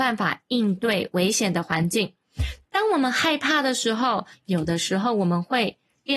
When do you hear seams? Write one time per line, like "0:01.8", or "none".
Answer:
0:02.6
0:04.3